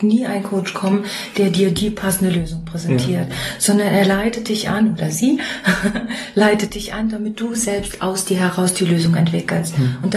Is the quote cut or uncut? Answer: uncut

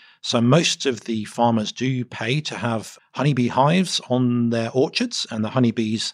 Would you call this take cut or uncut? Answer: cut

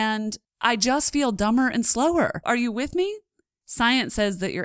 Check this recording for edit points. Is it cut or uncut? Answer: cut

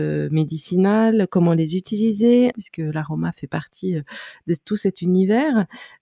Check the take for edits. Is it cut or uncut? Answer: cut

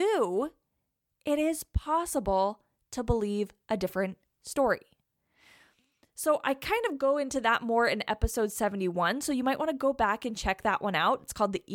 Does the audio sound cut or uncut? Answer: uncut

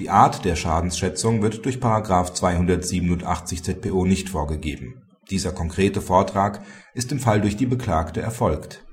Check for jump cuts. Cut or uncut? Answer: cut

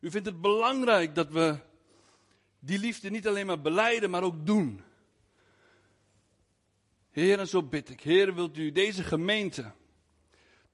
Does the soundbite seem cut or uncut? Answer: uncut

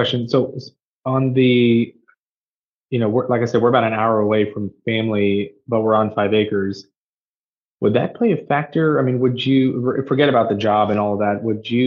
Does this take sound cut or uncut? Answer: uncut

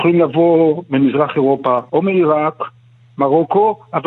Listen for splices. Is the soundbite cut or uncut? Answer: cut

